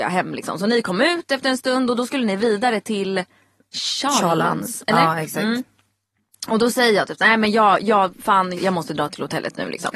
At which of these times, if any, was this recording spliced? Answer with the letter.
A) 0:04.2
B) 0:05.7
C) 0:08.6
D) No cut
C